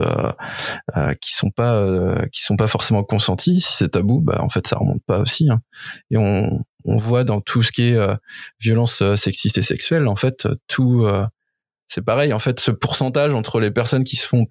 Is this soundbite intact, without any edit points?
yes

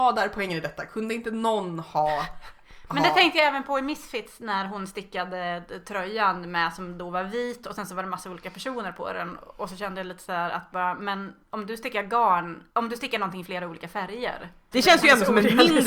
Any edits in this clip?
yes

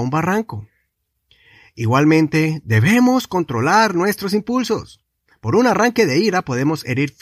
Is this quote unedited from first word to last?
yes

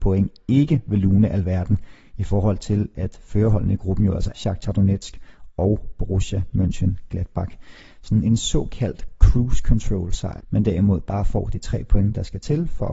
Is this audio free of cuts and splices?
no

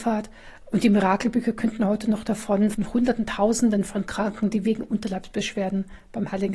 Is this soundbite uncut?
no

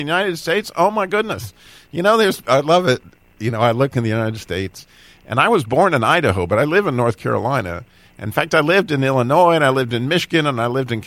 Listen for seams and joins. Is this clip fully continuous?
yes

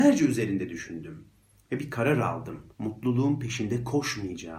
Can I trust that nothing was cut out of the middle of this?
no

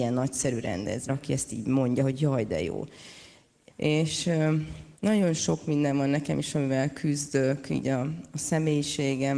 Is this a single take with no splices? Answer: no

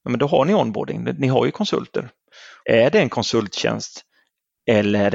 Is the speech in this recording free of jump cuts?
no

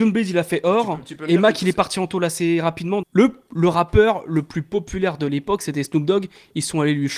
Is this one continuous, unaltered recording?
no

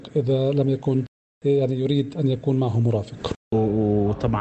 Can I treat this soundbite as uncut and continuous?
no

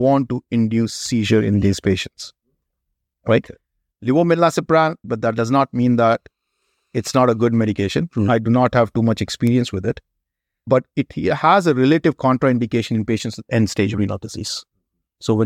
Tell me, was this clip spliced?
yes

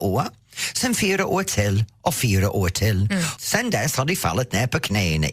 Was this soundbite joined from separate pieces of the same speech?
yes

